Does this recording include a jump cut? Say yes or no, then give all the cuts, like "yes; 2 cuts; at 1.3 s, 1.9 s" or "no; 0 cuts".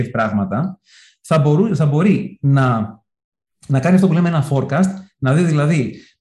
no; 0 cuts